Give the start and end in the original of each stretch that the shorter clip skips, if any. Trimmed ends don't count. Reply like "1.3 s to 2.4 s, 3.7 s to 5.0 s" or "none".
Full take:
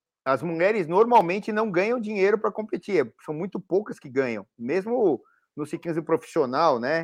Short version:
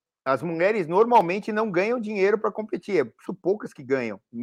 3.2 s to 3.5 s